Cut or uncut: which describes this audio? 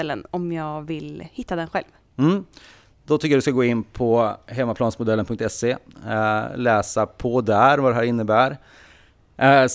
uncut